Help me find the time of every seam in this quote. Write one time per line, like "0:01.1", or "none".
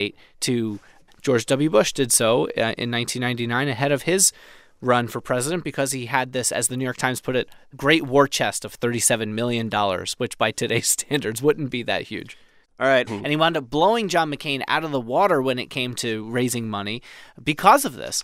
0:01.1
0:13.1